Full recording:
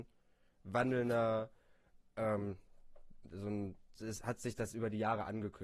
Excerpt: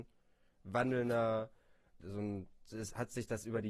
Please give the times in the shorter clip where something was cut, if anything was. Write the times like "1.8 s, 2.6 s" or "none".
2.0 s